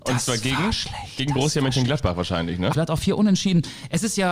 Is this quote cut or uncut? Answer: cut